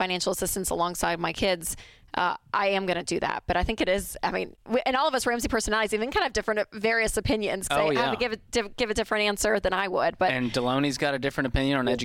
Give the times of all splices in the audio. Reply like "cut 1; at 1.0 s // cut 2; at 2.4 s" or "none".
cut 1; at 7.7 s